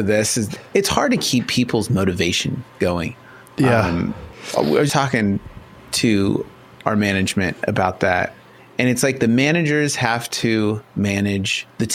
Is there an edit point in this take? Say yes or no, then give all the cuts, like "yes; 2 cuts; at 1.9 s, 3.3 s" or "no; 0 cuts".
yes; 1 cut; at 4.9 s